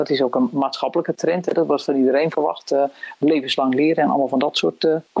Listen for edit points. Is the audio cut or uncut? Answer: uncut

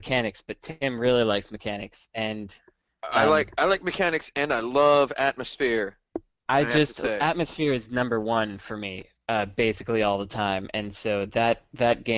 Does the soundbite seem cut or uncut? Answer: uncut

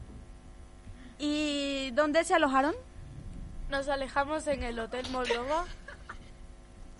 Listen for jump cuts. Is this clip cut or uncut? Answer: cut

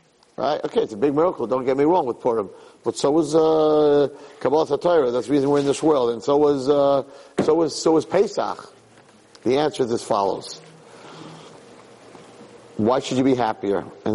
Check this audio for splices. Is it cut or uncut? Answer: uncut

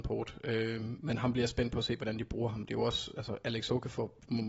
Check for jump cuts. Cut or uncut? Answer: uncut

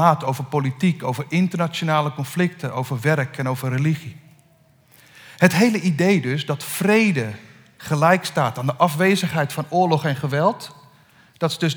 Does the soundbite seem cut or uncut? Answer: uncut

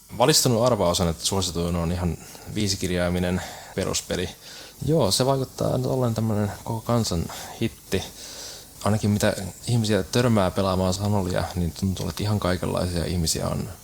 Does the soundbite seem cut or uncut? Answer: cut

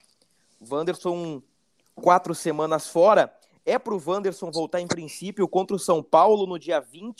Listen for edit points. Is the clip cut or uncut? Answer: uncut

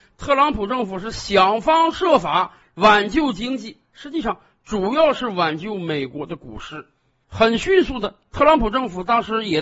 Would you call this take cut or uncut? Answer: uncut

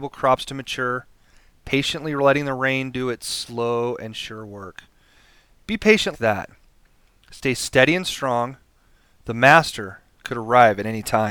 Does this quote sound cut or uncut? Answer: cut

